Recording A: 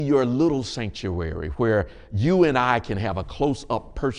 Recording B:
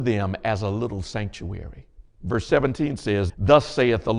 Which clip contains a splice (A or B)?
B